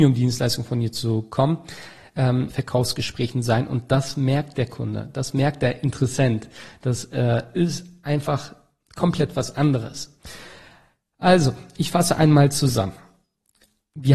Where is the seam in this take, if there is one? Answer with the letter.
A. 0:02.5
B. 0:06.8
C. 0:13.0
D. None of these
A